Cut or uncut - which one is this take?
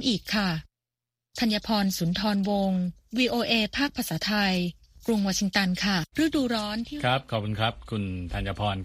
cut